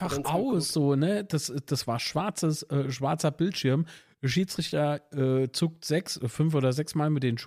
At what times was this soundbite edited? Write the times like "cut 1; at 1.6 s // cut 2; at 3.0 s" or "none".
none